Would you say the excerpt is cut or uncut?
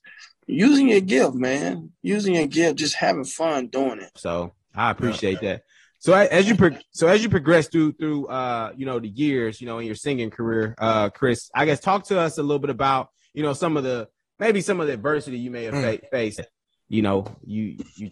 cut